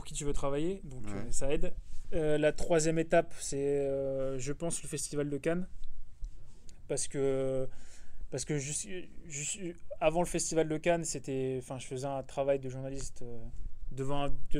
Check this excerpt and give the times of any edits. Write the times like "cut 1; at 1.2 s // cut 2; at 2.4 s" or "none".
none

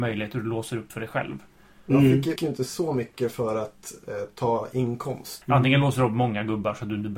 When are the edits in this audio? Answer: cut 1; at 2.4 s // cut 2; at 5.4 s

